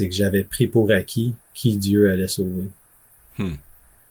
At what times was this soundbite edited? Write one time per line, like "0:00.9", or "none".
0:01.4